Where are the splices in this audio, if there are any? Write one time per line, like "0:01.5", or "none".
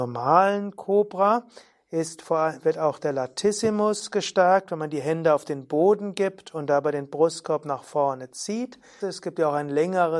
0:09.0